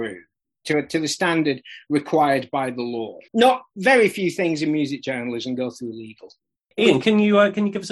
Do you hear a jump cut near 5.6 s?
no; 2 cuts; at 3.3 s, 7.0 s

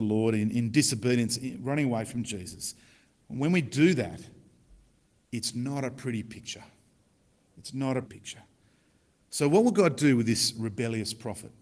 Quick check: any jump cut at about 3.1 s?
no; 1 cut; at 8.0 s

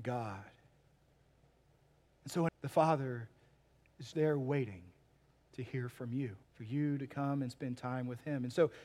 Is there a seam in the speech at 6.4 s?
yes; 3 cuts; at 2.5 s, 4.1 s, 6.4 s

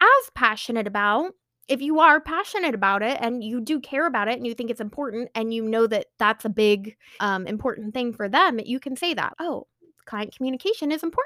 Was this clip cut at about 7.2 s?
yes; 2 cuts; at 7.2 s, 9.3 s

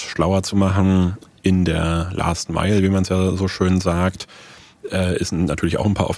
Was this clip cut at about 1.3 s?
no; 0 cuts

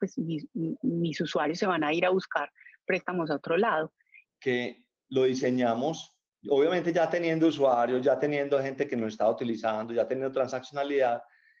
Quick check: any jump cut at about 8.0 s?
no; 1 cut; at 4.2 s

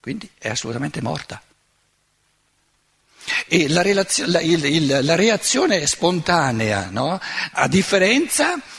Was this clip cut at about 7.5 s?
yes; 1 cut; at 7.5 s

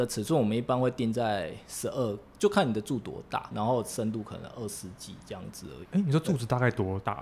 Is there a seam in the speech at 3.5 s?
yes; 1 cut; at 3.5 s

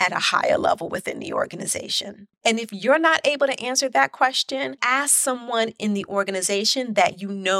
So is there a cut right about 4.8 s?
yes; 2 cuts; at 2.3 s, 4.8 s

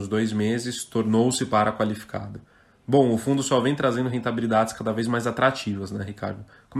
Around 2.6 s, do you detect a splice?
no; 0 cuts

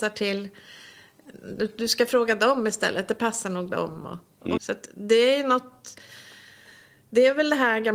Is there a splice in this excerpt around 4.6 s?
yes; 1 cut; at 4.6 s

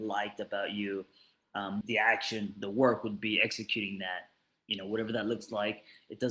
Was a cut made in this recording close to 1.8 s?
yes; 1 cut; at 1.8 s

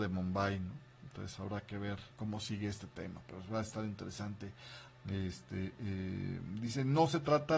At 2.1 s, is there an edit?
yes; 2 cuts; at 2.1 s, 4.9 s

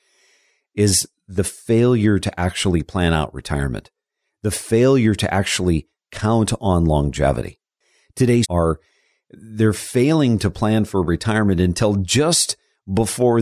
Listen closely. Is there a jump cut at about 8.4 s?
yes; 1 cut; at 8.4 s

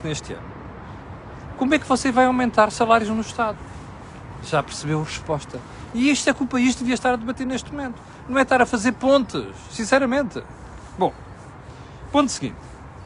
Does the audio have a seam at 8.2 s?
no; 1 cut; at 5.9 s

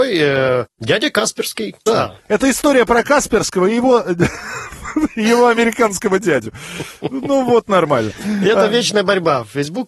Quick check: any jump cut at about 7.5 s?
no; 1 cut; at 1.9 s

